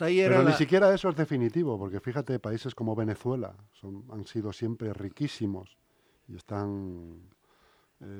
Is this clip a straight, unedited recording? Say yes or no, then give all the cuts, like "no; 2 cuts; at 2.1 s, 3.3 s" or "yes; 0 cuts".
yes; 0 cuts